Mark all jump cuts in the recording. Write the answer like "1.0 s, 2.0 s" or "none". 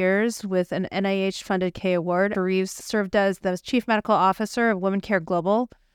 2.3 s

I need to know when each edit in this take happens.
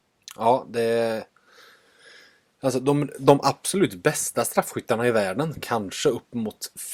5.5 s

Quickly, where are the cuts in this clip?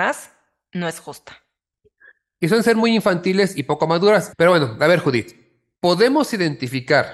4.3 s, 5.7 s

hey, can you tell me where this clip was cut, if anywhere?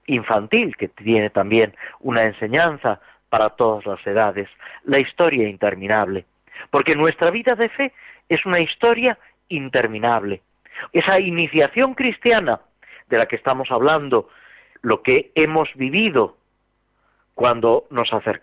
10.9 s, 14.7 s

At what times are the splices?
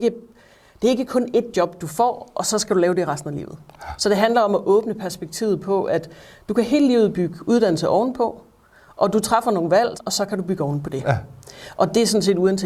9.9 s

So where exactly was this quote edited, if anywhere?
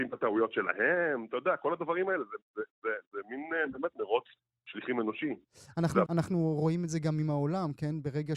6.1 s

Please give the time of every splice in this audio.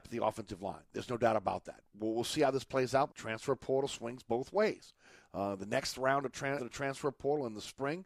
3.1 s, 6.6 s

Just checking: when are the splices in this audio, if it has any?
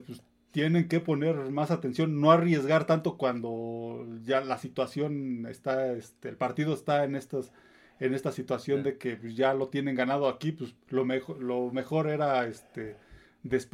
none

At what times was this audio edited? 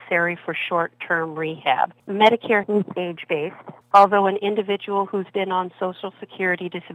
2.0 s

